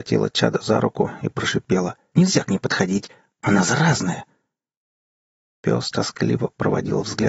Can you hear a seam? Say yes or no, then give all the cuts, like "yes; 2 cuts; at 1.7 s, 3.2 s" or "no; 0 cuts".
yes; 1 cut; at 2.1 s